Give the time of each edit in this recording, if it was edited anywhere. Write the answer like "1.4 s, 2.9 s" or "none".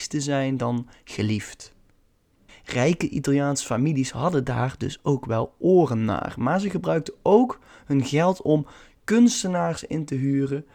2.5 s